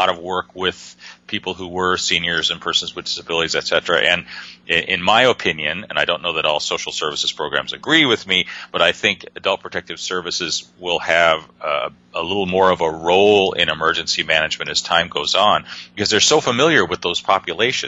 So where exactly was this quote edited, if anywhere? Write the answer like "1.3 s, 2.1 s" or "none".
none